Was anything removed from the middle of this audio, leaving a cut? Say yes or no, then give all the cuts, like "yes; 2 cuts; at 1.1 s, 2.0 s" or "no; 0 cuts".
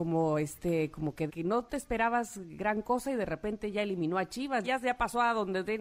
yes; 2 cuts; at 1.3 s, 4.6 s